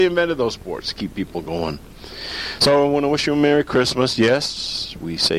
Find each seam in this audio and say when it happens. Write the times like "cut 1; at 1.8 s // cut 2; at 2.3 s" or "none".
none